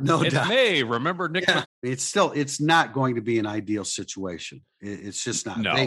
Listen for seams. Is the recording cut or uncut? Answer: cut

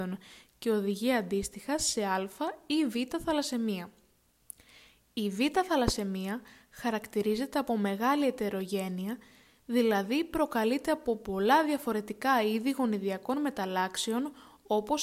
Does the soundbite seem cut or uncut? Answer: uncut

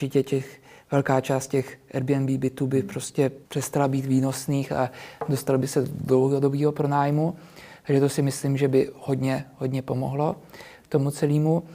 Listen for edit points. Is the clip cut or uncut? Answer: cut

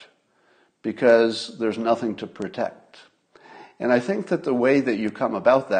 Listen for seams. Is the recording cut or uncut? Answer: uncut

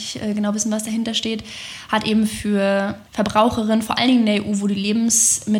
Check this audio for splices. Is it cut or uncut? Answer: cut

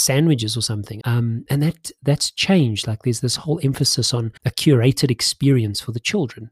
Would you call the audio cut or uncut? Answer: cut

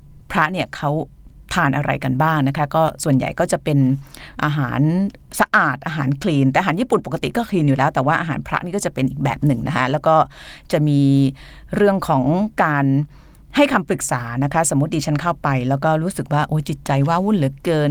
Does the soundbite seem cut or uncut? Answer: uncut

